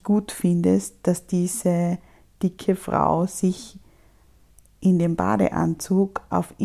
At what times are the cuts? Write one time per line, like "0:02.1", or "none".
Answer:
none